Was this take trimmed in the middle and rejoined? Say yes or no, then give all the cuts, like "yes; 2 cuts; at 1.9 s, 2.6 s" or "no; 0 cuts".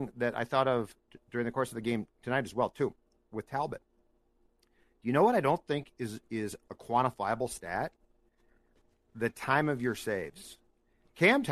no; 0 cuts